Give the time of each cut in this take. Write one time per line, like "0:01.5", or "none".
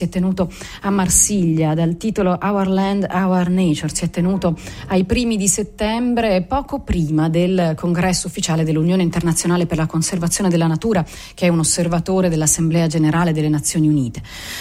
none